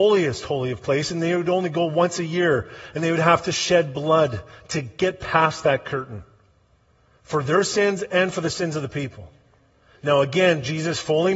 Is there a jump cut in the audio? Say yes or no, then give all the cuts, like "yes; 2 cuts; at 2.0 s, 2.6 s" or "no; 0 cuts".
no; 0 cuts